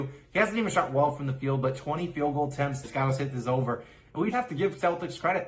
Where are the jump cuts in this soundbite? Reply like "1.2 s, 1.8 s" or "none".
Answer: 2.8 s, 4.3 s